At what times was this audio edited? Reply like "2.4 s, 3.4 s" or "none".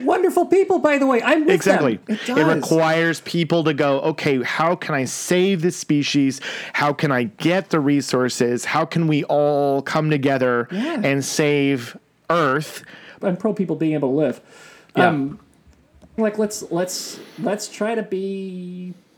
2.0 s, 13.2 s, 16.2 s